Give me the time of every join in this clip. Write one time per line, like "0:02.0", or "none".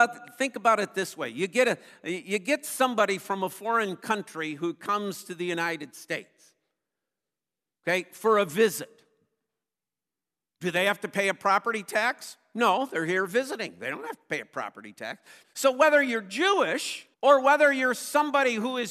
0:15.4
0:17.1